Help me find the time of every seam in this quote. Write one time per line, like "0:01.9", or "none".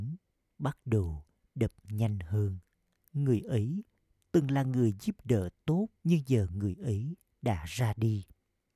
0:03.0
0:06.0